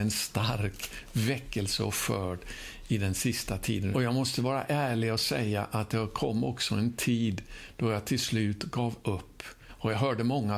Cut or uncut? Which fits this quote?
cut